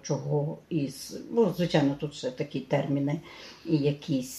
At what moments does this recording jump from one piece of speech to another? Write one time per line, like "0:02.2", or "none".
none